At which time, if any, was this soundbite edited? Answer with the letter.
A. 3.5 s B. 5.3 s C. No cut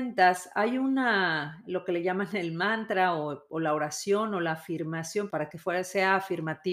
B